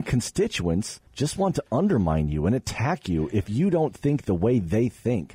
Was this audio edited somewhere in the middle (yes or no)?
yes